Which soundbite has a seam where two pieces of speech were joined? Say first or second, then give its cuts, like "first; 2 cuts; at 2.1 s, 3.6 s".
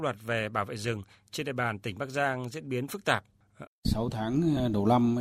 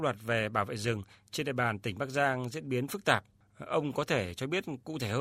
first; 1 cut; at 3.7 s